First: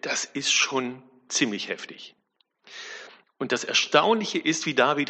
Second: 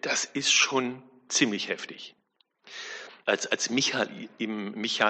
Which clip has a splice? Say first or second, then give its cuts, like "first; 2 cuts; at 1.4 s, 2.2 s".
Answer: second; 1 cut; at 3.2 s